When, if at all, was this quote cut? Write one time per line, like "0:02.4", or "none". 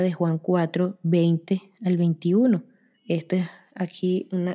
0:02.9